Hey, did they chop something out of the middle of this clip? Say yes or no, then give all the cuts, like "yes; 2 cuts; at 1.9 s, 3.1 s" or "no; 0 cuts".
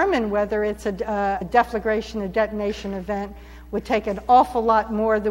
yes; 1 cut; at 1.4 s